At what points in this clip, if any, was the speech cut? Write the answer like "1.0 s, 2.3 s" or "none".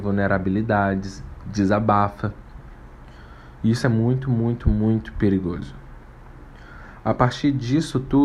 none